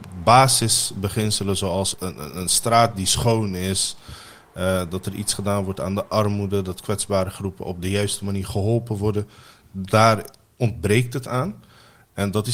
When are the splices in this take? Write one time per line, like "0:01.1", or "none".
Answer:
0:01.9